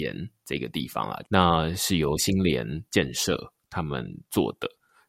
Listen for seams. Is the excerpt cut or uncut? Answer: cut